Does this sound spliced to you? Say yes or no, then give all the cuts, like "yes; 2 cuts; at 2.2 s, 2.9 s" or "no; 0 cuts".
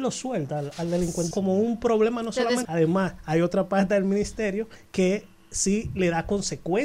yes; 2 cuts; at 1.3 s, 2.6 s